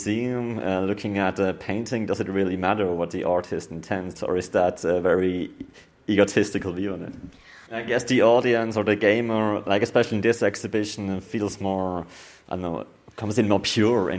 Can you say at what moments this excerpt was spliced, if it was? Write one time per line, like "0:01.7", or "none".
0:04.1
0:07.7